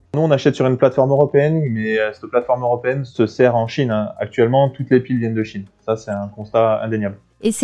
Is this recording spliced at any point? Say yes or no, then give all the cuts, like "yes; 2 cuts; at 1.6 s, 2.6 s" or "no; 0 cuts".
no; 0 cuts